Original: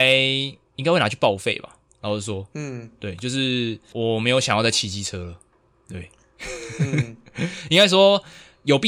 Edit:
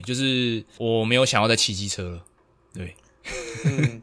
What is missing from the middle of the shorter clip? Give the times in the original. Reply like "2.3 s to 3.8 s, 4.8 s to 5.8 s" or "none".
none